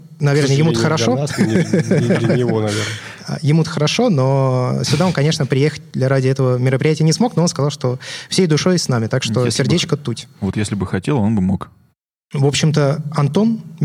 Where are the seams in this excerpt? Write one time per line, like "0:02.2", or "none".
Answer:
none